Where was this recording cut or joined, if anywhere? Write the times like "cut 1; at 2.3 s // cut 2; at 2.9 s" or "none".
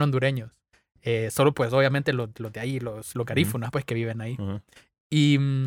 none